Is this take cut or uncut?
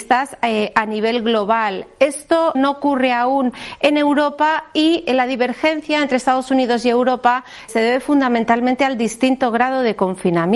cut